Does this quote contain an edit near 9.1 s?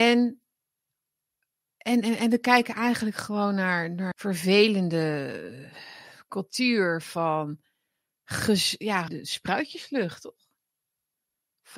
yes; 2 cuts; at 4.1 s, 9.1 s

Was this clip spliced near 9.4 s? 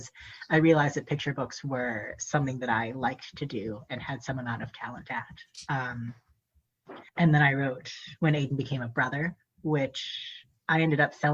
no; 1 cut; at 7.1 s

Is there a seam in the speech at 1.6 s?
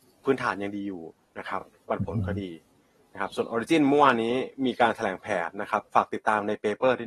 no; 0 cuts

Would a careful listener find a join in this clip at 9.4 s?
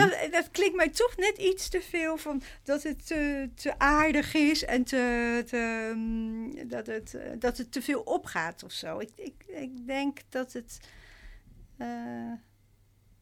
no; 0 cuts

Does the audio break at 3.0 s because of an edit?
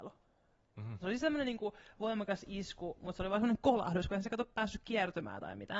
no; 1 cut; at 1.0 s

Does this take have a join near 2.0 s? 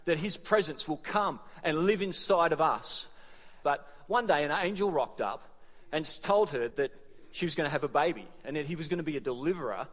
no; 2 cuts; at 3.6 s, 6.7 s

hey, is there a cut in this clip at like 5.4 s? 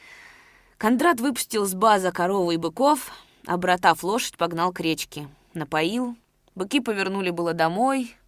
no; 0 cuts

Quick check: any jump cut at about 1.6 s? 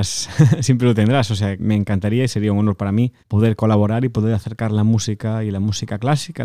yes; 2 cuts; at 1.6 s, 3.2 s

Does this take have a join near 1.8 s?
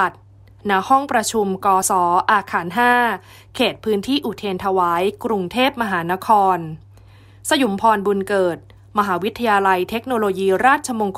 yes; 1 cut; at 1.8 s

